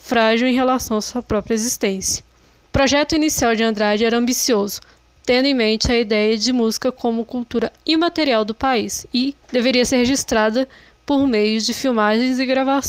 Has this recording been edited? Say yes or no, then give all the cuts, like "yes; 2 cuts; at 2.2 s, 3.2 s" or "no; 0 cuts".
yes; 2 cuts; at 2.6 s, 9.4 s